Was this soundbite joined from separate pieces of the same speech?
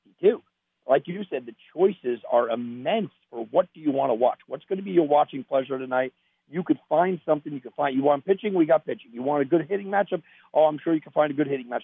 no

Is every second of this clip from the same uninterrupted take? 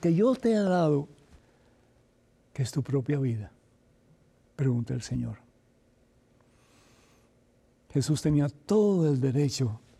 no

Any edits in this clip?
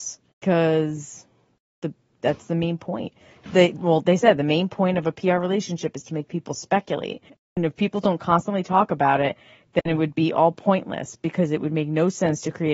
no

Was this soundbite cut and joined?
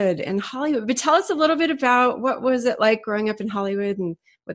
no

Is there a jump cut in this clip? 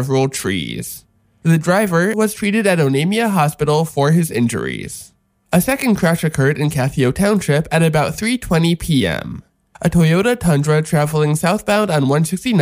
yes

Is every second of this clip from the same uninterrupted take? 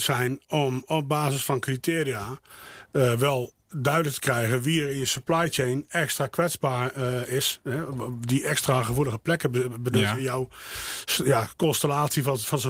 yes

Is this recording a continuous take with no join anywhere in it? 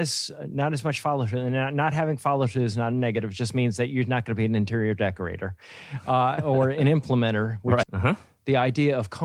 no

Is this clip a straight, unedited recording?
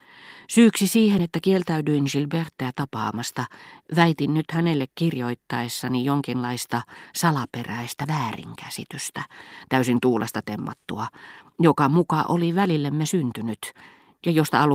yes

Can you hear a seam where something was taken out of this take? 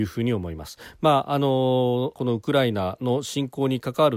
yes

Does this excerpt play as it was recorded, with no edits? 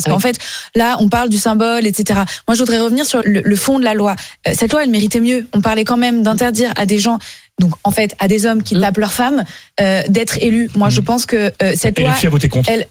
no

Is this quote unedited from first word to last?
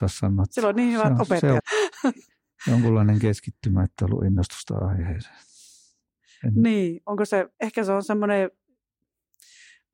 no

